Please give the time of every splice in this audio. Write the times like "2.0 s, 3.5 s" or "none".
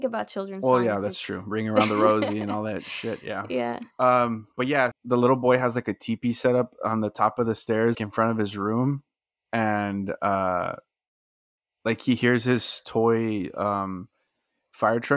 4.9 s, 7.9 s